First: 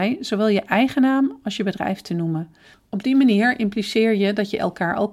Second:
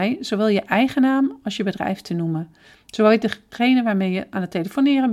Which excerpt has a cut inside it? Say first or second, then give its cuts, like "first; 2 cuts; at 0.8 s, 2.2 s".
first; 1 cut; at 2.7 s